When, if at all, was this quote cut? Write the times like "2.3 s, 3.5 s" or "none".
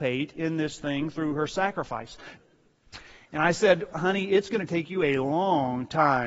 2.4 s, 3.9 s